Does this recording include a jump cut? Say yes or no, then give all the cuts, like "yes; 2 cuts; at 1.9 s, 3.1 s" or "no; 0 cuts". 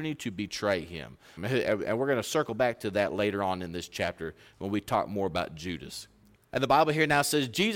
yes; 2 cuts; at 1.4 s, 6.3 s